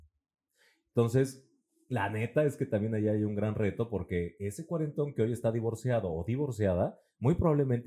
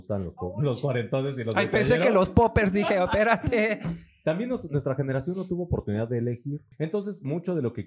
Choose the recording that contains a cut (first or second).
second